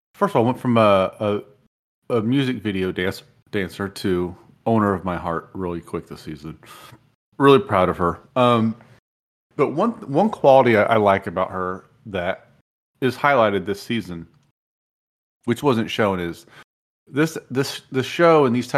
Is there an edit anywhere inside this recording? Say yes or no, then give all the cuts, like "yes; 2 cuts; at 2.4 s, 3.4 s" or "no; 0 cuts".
no; 0 cuts